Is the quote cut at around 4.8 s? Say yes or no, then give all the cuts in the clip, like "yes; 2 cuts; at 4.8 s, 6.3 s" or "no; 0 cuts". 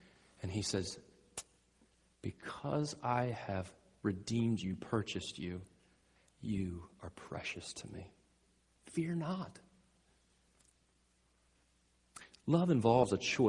no; 1 cut; at 6.3 s